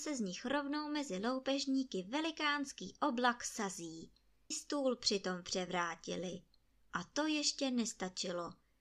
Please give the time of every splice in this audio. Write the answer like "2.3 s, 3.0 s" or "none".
4.5 s, 6.8 s